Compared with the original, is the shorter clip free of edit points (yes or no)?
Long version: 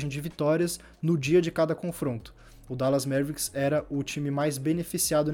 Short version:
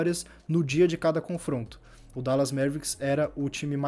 yes